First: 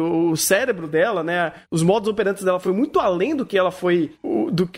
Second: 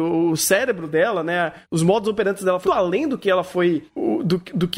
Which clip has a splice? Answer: second; 1 cut; at 2.6 s

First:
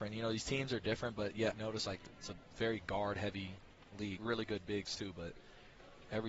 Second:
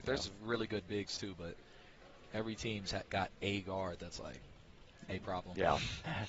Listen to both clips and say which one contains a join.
first; 2 cuts; at 1.5 s, 4.2 s

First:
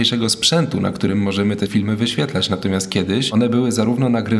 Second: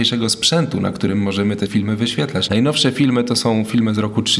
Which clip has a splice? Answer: second; 1 cut; at 2.5 s

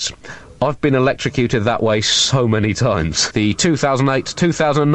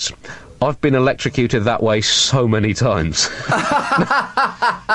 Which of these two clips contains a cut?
first; 1 cut; at 3.3 s

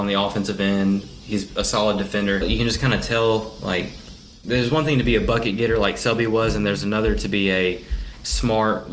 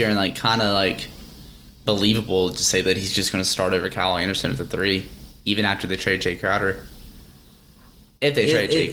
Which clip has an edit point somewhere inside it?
first; 1 cut; at 2.4 s

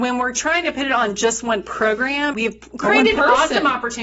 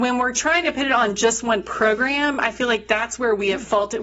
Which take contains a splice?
first; 1 cut; at 2.3 s

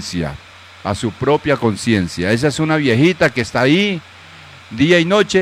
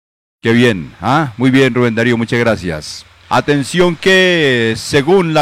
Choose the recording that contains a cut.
second; 1 cut; at 3.3 s

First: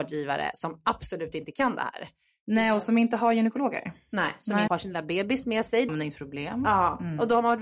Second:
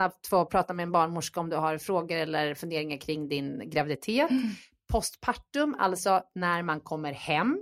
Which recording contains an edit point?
first; 2 cuts; at 4.7 s, 5.9 s

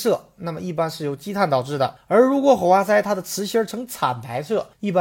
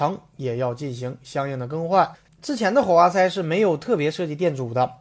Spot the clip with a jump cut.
second; 1 cut; at 2.3 s

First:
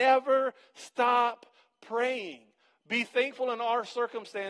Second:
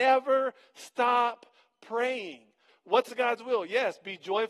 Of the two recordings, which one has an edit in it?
second; 1 cut; at 2.7 s

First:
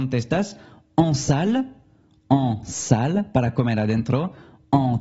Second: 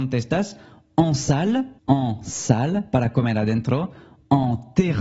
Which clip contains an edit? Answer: second; 1 cut; at 1.8 s

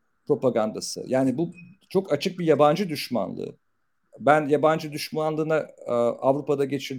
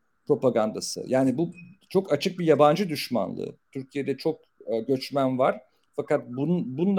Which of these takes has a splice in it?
second; 1 cut; at 3.7 s

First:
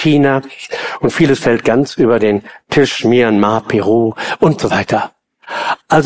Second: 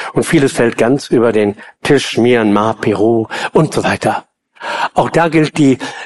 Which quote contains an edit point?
second; 1 cut; at 4.9 s

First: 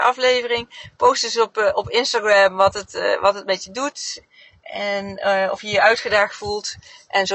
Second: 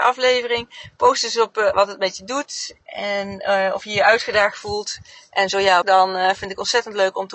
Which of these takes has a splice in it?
second; 3 cuts; at 1.7 s, 2.8 s, 5.8 s

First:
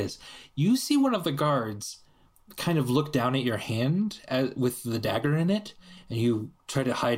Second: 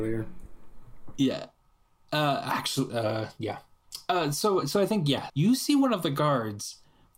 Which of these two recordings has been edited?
second; 1 cut; at 5.3 s

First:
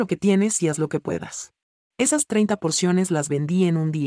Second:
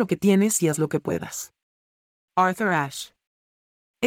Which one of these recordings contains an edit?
first; 1 cut; at 1.9 s

